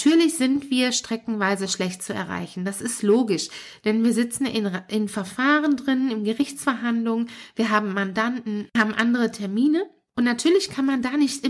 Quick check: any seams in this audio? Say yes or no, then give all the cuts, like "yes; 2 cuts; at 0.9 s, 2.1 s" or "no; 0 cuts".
no; 0 cuts